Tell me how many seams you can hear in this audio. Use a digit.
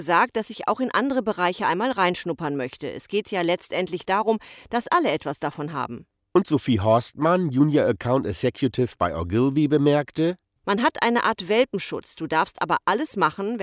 0